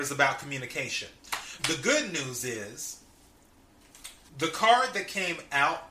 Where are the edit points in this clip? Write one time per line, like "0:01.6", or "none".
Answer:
0:01.6
0:04.3